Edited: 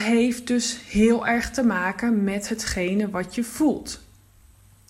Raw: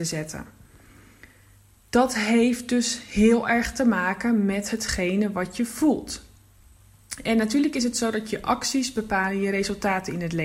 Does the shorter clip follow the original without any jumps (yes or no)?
yes